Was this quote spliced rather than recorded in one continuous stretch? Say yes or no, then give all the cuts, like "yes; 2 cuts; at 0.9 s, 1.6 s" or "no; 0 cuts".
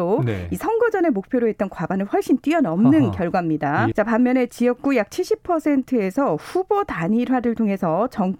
yes; 1 cut; at 3.9 s